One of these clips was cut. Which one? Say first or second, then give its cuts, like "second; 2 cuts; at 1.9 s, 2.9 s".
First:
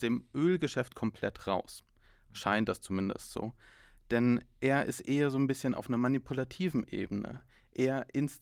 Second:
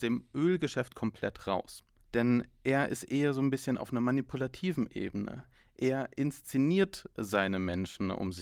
second; 1 cut; at 2.0 s